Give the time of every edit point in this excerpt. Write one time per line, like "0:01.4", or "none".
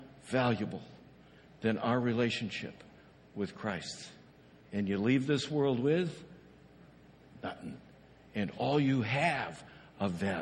0:04.7